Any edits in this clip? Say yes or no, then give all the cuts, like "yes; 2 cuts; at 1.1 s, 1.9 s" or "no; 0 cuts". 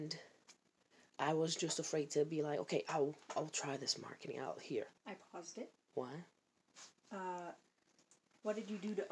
yes; 1 cut; at 5.0 s